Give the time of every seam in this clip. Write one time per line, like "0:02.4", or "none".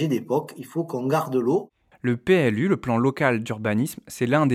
0:01.9